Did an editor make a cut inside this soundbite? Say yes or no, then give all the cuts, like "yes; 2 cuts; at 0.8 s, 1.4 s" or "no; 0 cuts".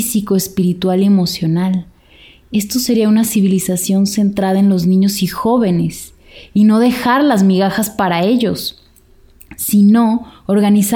no; 0 cuts